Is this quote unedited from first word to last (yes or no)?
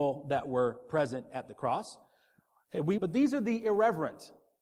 no